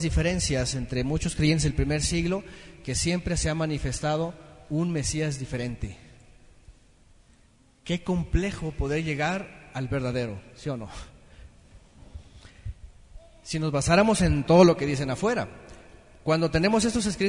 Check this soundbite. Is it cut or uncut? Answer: uncut